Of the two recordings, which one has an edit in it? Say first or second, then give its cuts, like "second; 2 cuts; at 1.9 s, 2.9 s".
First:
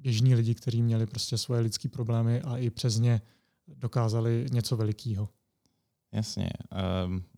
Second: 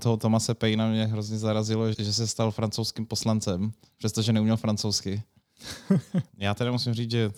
second; 2 cuts; at 1.9 s, 6.3 s